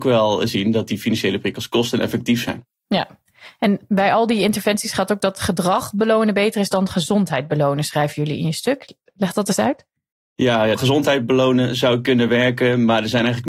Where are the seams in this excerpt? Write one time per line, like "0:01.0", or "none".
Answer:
0:10.7